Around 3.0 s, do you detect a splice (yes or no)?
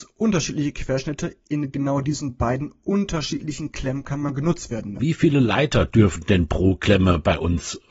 no